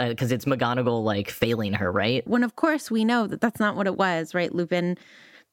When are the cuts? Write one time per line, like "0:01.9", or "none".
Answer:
0:02.3